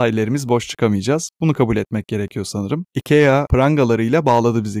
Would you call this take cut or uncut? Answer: uncut